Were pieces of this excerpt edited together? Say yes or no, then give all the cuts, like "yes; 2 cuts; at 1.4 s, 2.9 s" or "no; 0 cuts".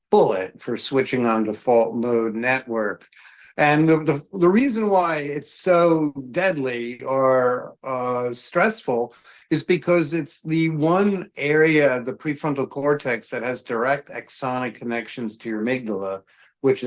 no; 0 cuts